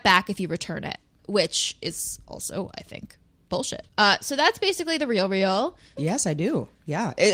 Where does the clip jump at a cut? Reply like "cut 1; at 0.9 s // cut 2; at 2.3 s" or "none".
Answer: cut 1; at 3.9 s // cut 2; at 6.0 s